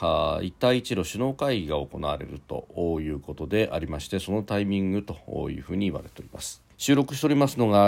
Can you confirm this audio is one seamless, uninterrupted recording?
no; 1 cut; at 6.7 s

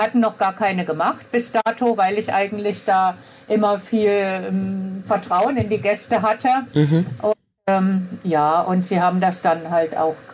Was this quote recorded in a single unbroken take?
yes; 0 cuts

